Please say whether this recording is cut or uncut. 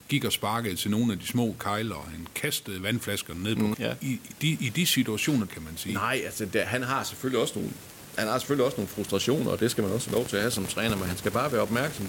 cut